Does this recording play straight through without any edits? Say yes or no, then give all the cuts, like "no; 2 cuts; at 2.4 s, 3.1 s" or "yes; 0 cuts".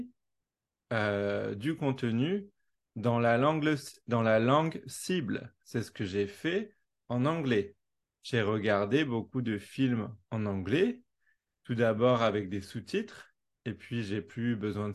yes; 0 cuts